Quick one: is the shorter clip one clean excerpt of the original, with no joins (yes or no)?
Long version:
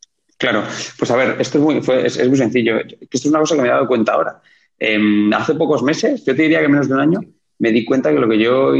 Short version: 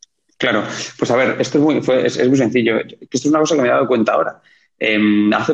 yes